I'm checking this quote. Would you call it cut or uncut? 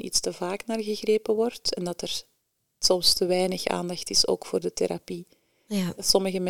uncut